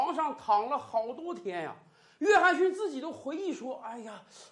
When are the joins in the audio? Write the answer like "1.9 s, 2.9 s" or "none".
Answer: none